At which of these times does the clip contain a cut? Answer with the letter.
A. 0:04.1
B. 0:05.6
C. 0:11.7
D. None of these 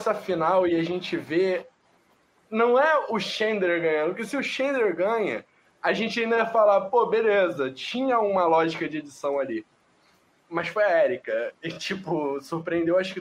D